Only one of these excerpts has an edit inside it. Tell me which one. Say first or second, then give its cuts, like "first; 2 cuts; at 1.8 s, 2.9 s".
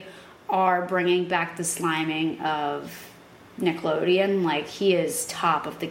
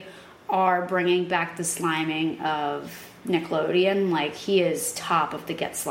second; 1 cut; at 3.2 s